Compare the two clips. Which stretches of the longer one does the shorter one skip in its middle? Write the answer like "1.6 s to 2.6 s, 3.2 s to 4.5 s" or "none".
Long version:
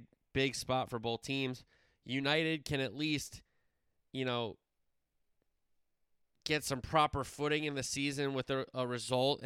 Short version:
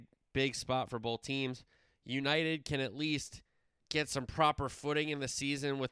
3.8 s to 6.4 s